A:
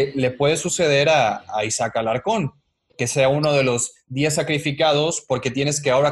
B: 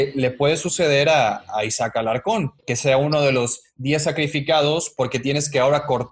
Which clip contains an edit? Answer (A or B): B